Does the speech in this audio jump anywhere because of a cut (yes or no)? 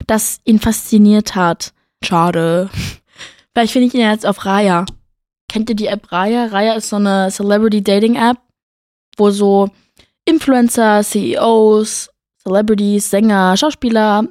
yes